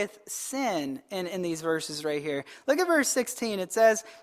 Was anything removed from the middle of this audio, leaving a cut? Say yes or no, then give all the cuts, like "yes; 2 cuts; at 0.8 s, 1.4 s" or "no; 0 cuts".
no; 0 cuts